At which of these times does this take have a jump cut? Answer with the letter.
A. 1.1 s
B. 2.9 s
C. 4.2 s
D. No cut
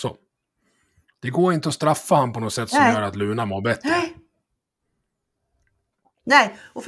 D